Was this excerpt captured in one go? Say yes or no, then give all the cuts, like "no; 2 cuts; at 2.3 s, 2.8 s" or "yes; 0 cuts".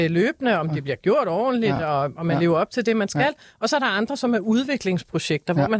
yes; 0 cuts